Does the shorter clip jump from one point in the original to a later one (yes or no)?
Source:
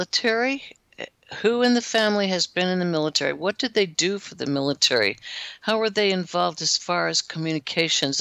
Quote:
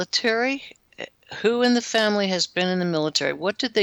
no